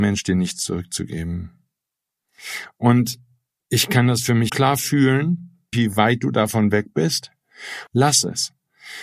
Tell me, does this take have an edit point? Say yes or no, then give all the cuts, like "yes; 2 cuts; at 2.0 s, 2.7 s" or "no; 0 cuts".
yes; 3 cuts; at 4.5 s, 5.7 s, 7.9 s